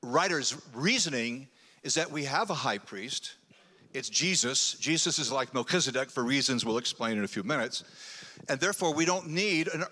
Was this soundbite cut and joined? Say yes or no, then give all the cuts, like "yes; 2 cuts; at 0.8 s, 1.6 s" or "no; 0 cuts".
no; 0 cuts